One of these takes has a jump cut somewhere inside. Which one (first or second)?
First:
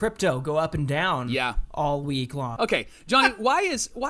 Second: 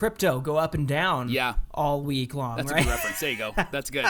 first